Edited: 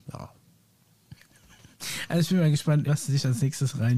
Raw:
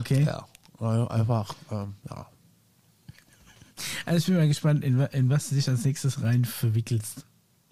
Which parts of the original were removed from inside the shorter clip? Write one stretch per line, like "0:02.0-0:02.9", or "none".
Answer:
0:04.8-0:05.3